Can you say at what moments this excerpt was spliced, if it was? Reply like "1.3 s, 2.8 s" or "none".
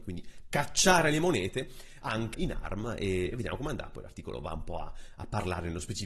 2.3 s